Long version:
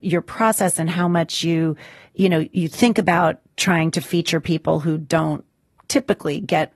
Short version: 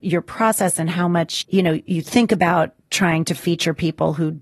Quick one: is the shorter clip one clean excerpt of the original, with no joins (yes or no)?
no